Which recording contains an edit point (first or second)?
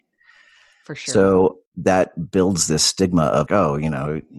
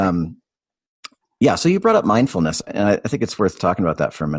first